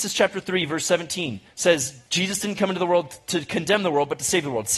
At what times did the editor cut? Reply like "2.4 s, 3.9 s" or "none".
2.1 s